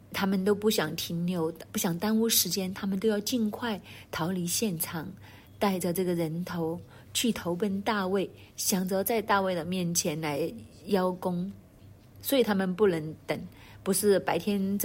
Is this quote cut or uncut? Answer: cut